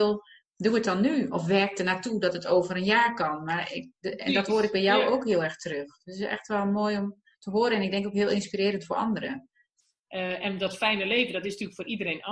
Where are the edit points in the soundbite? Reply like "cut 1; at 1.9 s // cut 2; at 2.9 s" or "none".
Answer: cut 1; at 10.0 s